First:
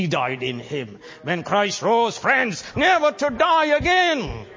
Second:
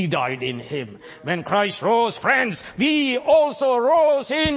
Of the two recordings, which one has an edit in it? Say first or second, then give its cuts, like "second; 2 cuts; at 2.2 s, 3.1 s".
first; 1 cut; at 2.7 s